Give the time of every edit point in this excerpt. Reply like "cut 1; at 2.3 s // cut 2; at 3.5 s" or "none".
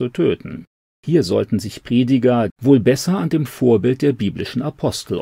cut 1; at 2.5 s